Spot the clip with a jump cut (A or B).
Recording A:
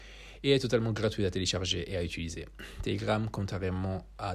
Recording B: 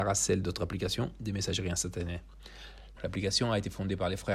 B